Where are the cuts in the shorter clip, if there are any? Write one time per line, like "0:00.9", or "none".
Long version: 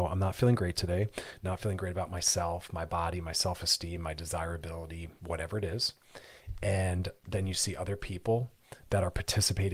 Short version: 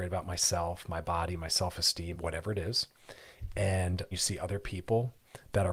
0:02.1
0:04.1